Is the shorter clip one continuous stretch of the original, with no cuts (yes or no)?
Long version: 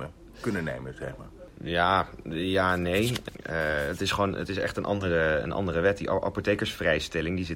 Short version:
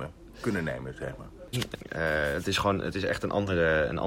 no